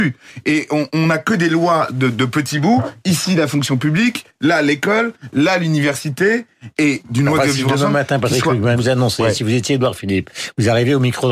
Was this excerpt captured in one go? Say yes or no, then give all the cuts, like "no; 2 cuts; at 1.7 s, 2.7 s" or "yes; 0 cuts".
no; 2 cuts; at 6.8 s, 8.8 s